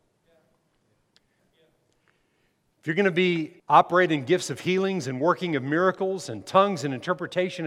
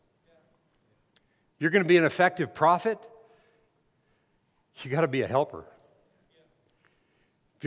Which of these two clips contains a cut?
first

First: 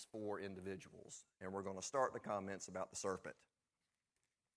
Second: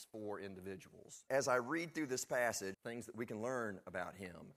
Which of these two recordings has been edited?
second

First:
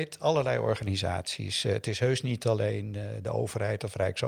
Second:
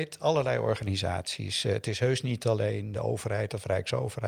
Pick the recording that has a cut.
second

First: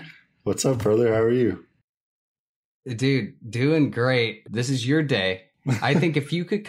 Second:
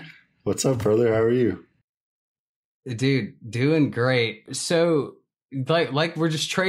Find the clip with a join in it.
first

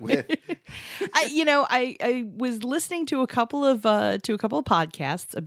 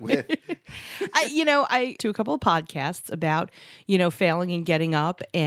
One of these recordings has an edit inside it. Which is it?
second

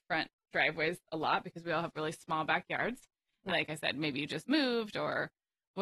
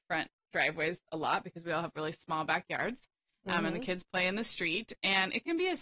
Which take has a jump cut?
first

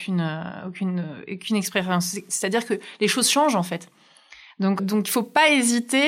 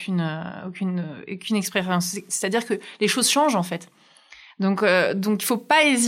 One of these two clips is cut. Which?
first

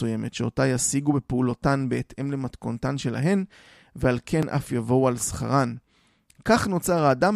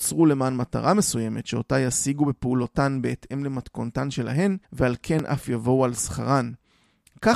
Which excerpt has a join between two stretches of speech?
second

